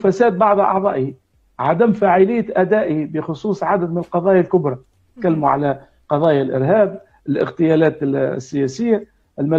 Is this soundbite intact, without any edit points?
yes; 0 cuts

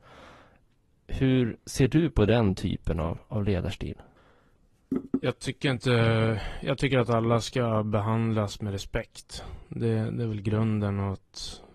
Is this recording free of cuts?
no; 1 cut; at 1.6 s

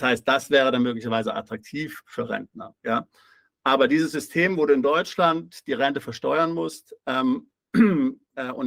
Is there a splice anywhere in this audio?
no; 0 cuts

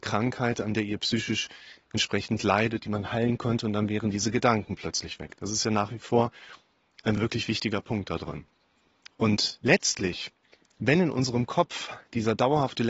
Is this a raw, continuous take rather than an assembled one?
yes; 0 cuts

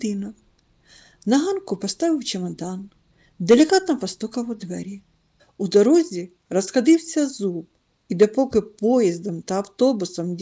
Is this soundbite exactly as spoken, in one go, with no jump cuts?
no; 1 cut; at 5.4 s

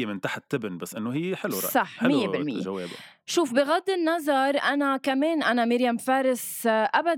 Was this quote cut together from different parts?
no; 0 cuts

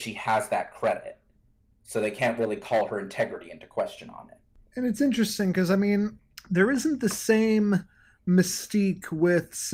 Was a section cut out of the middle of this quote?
no; 0 cuts

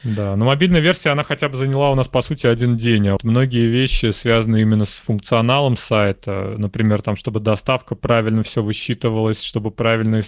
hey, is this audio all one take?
no; 1 cut; at 3.2 s

